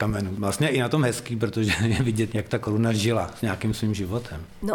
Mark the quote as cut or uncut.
cut